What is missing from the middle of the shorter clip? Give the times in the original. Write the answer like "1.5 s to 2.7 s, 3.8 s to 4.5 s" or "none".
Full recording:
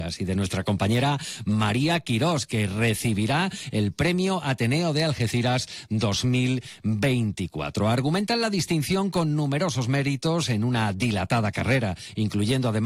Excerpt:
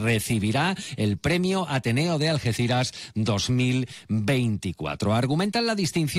none